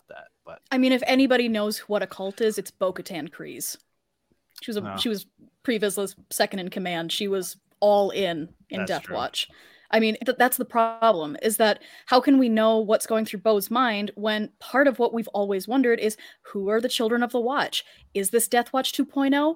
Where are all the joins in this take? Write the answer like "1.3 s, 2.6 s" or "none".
10.2 s